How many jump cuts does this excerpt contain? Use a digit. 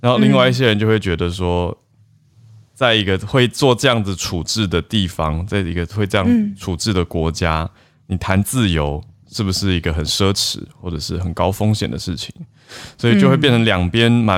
0